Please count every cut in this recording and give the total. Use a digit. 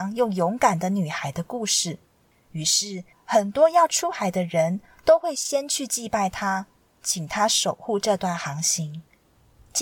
1